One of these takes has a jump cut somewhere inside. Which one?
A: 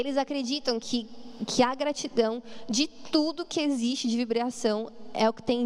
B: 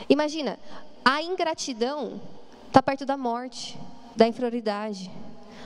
B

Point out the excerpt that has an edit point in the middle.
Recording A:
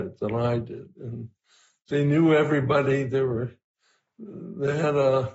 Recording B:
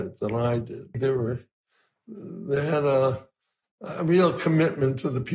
B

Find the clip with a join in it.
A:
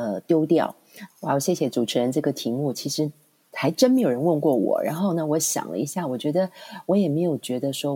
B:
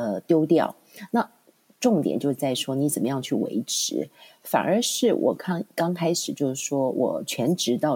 A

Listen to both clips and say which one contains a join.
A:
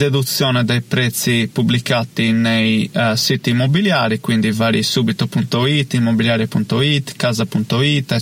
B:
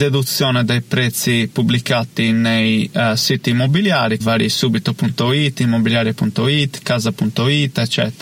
B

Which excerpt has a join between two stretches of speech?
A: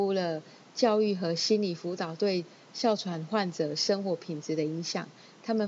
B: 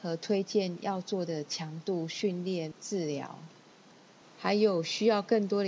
B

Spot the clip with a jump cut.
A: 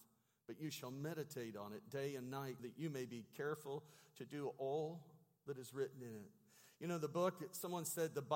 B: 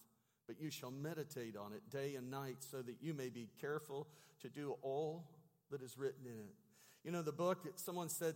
A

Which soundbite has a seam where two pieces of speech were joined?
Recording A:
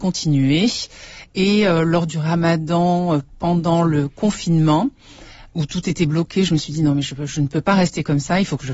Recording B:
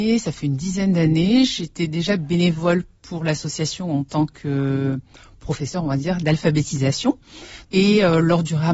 B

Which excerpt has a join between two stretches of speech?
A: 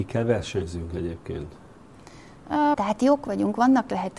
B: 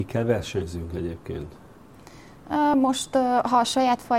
A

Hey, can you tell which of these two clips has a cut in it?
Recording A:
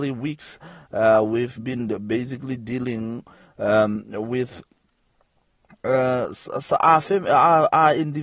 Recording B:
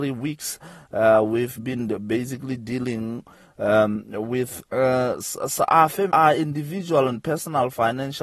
B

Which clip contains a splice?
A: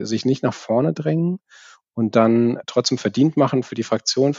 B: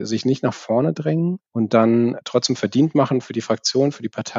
B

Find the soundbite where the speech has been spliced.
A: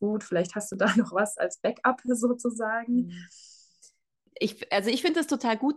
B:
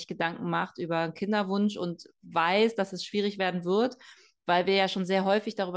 A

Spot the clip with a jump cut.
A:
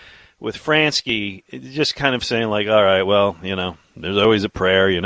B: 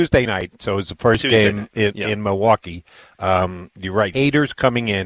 B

